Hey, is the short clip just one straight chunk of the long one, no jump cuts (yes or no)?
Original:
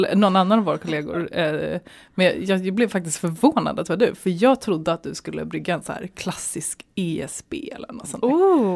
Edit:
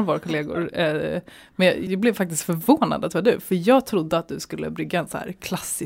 no